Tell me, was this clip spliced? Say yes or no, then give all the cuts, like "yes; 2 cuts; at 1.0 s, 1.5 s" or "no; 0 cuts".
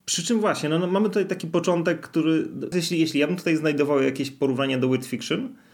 yes; 1 cut; at 2.7 s